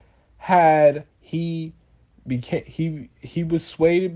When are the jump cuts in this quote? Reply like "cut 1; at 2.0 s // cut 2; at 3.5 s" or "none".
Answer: cut 1; at 1.1 s